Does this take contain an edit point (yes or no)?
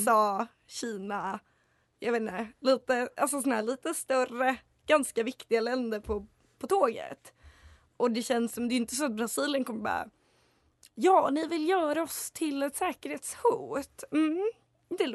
no